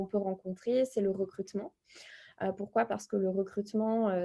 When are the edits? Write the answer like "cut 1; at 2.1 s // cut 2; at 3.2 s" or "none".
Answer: none